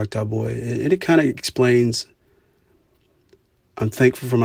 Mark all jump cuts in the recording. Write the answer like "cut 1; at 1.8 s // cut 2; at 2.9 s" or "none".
none